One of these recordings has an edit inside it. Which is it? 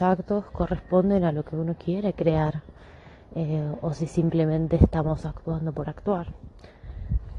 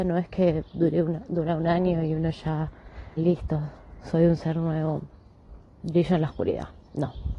second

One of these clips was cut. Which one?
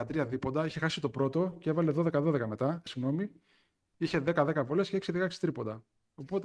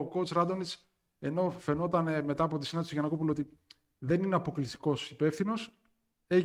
first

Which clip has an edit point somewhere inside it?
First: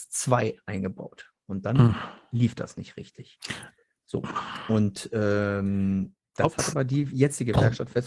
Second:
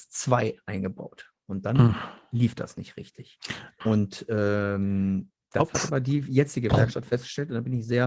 second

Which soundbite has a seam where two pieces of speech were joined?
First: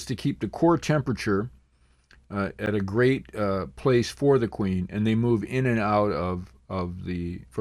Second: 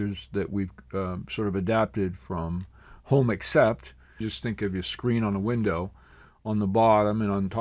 second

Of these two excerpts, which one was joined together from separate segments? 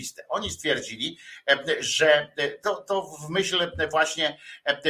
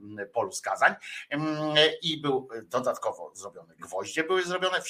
second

